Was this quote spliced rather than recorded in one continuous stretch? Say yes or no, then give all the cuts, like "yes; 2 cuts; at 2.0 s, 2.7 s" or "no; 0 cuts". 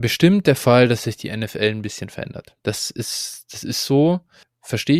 no; 0 cuts